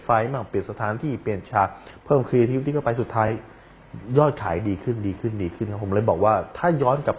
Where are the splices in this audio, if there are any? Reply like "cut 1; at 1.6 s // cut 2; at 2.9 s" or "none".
none